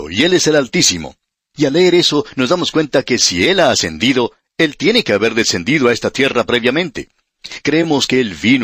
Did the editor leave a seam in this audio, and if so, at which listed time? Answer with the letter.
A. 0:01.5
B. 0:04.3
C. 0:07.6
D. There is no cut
A